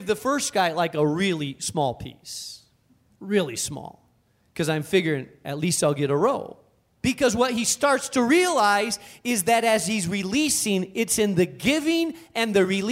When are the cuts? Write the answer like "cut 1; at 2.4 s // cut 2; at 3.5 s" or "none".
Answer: cut 1; at 7.0 s